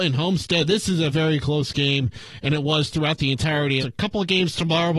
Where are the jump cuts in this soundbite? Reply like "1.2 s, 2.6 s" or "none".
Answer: 1.1 s, 3.8 s